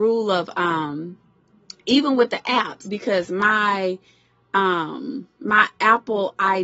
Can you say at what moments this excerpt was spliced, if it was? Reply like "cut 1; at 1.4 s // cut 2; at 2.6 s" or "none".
cut 1; at 2.8 s

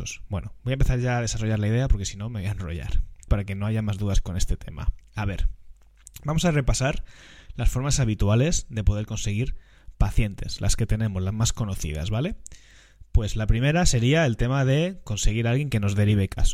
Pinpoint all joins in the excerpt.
cut 1; at 3.3 s // cut 2; at 5.0 s

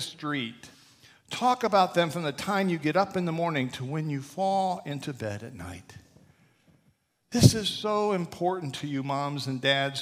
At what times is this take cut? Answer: none

